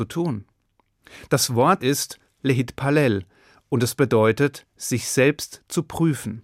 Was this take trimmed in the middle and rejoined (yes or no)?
yes